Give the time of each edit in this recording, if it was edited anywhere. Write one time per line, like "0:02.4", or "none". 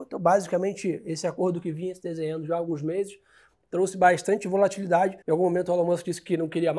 0:05.2